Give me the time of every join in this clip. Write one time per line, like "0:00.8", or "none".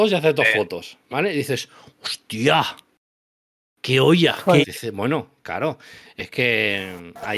0:04.6